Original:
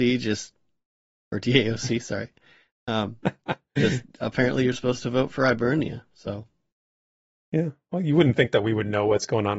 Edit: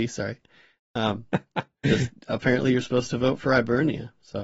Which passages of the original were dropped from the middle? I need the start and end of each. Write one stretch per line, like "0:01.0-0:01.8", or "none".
none